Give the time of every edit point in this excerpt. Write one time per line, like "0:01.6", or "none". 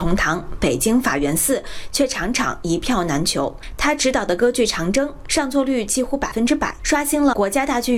none